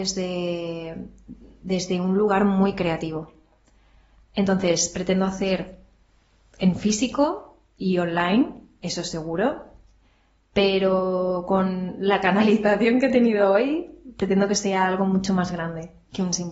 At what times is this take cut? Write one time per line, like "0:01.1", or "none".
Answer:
none